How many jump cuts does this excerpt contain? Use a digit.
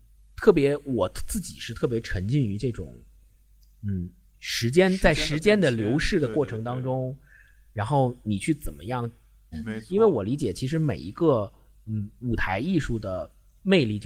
1